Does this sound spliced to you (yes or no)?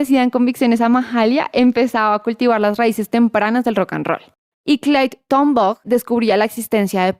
yes